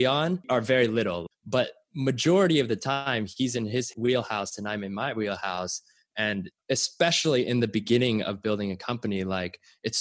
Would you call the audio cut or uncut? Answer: cut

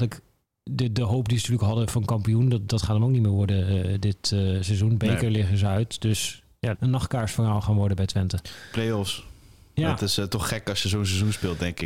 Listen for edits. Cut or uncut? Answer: cut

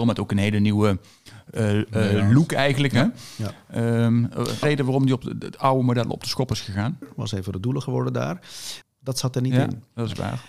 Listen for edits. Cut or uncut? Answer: cut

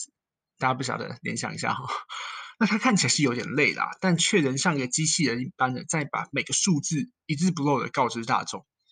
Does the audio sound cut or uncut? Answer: uncut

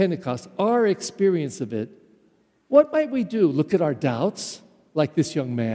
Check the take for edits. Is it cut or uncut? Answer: uncut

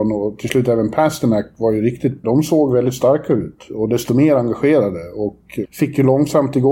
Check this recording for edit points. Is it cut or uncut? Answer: cut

